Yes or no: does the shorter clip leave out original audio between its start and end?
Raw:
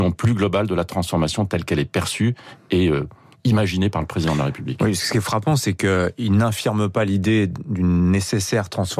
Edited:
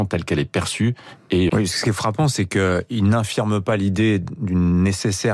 yes